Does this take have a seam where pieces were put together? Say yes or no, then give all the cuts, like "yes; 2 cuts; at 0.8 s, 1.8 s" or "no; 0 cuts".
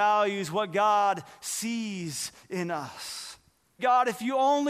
yes; 1 cut; at 3.8 s